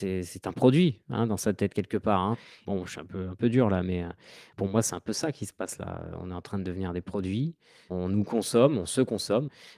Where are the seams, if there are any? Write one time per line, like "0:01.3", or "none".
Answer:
none